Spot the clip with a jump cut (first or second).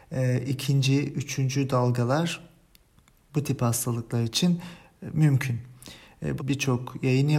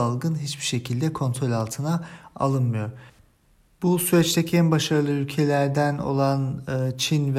first